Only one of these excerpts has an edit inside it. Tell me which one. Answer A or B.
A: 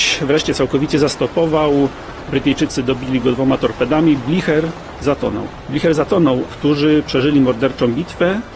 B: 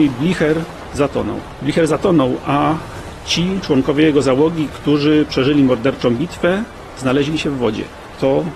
A